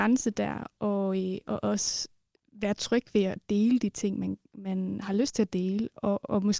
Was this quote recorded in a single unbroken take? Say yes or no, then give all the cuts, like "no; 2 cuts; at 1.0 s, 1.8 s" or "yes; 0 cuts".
yes; 0 cuts